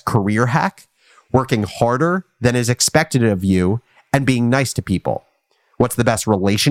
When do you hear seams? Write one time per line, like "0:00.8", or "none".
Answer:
none